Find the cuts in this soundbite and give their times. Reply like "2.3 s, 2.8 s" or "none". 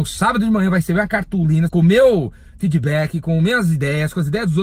1.7 s